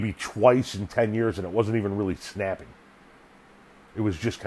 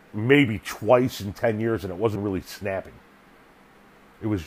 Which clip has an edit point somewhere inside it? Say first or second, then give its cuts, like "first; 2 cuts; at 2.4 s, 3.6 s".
second; 1 cut; at 2.2 s